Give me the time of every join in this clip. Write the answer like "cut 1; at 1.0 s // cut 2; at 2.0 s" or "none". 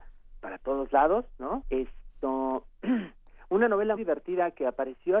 cut 1; at 1.6 s // cut 2; at 4.0 s

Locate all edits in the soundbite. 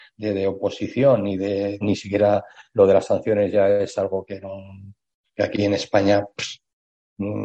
cut 1; at 1.8 s

